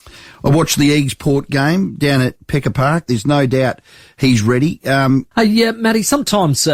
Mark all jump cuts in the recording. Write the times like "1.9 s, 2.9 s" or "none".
3.1 s, 5.3 s